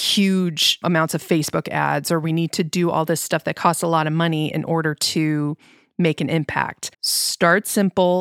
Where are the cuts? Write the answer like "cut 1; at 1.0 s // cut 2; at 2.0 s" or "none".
cut 1; at 6.9 s

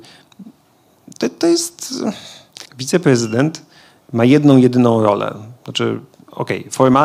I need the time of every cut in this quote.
cut 1; at 2.7 s

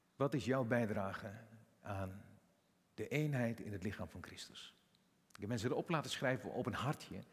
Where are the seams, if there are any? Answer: none

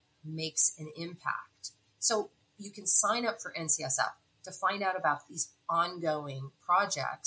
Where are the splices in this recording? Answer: none

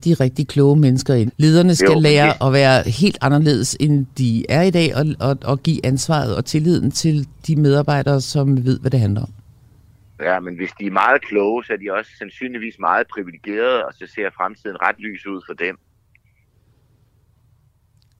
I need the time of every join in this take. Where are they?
cut 1; at 1.3 s

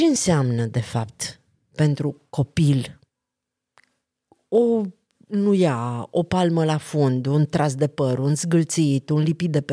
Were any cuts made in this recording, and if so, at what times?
none

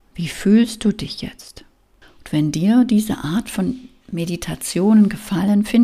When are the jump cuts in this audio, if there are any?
cut 1; at 2.0 s

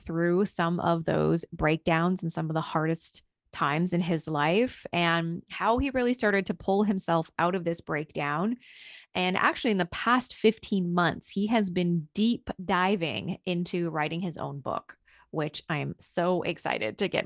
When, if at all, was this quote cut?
none

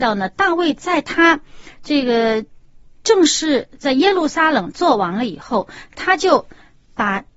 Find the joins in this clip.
none

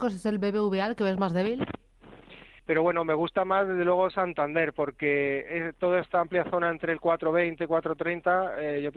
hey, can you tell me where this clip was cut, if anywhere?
cut 1; at 2.6 s

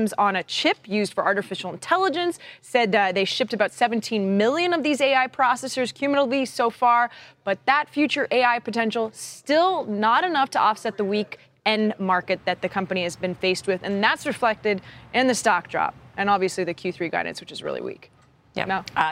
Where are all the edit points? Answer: none

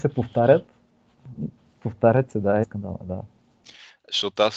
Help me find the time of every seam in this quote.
cut 1; at 2.6 s

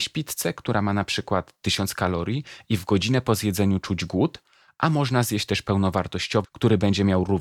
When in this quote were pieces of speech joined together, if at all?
cut 1; at 6.4 s

